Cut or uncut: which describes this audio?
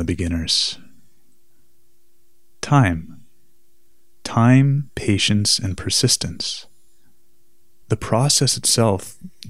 cut